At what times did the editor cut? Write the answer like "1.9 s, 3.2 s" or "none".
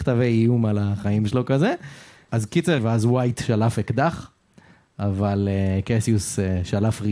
2.8 s

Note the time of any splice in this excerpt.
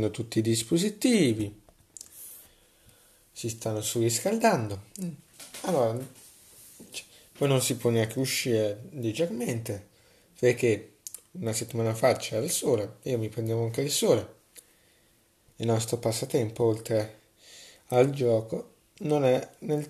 15.5 s

